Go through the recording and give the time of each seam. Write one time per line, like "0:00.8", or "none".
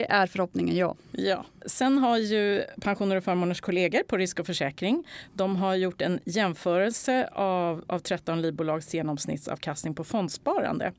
none